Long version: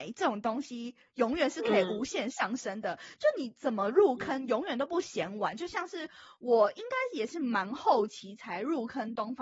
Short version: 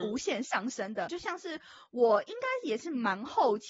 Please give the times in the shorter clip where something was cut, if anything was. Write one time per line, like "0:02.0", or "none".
0:01.1